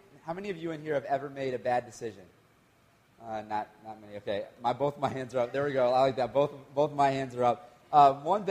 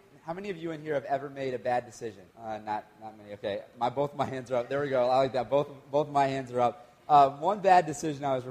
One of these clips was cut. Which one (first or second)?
second